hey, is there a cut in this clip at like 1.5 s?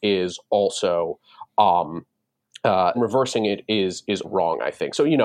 no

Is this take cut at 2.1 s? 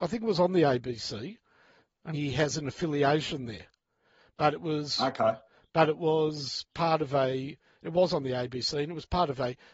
yes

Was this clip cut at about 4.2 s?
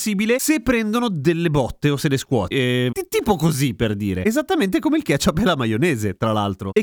no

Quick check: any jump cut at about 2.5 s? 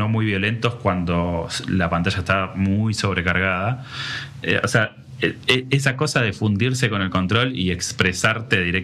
no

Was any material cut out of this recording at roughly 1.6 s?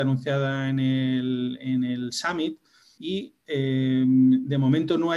no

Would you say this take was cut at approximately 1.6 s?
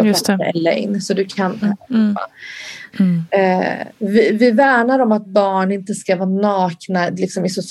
yes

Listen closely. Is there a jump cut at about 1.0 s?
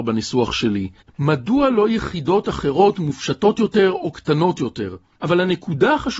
yes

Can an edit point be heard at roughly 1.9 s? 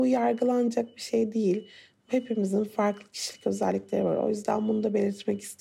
no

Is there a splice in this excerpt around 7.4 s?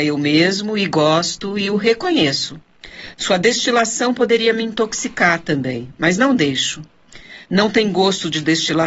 yes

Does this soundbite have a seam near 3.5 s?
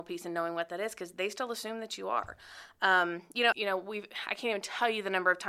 yes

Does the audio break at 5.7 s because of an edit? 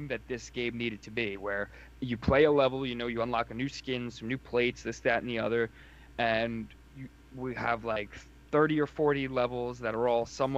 no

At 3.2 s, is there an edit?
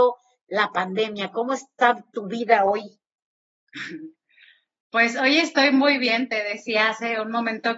yes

